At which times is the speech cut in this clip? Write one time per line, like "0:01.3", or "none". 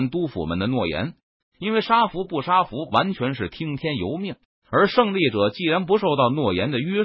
0:01.4
0:02.9